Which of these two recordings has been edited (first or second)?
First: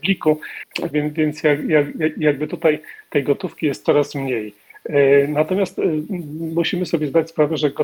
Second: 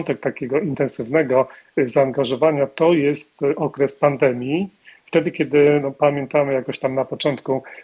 first